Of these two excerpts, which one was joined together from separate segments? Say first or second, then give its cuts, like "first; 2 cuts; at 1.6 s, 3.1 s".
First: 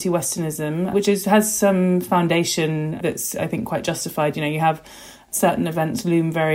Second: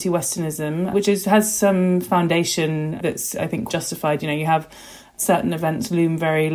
second; 1 cut; at 3.7 s